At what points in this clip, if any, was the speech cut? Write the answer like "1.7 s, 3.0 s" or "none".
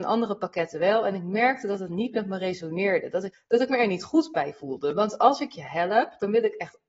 3.3 s